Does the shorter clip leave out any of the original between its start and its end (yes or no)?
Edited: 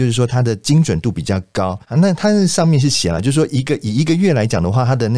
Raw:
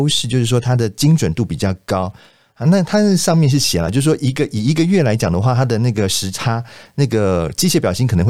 yes